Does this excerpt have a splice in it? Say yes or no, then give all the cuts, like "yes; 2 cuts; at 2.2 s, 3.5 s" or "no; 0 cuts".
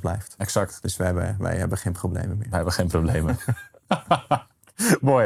no; 0 cuts